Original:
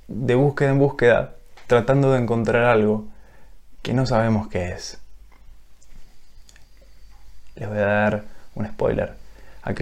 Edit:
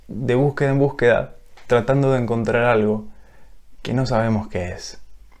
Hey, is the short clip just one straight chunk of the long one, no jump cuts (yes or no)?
yes